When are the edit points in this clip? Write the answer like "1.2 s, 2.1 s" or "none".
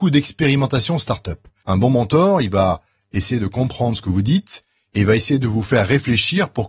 1.6 s, 4.9 s